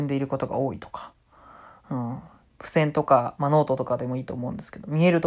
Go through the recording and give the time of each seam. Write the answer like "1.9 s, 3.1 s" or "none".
2.4 s